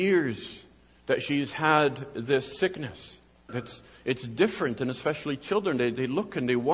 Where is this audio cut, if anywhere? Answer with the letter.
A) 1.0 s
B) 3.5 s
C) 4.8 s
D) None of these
B